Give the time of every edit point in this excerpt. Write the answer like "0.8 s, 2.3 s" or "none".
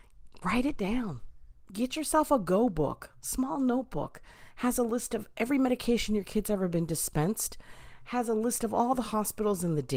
none